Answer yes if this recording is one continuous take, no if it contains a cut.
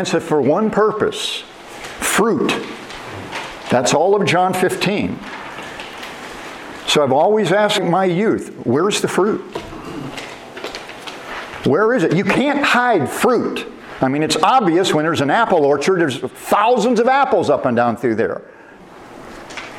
no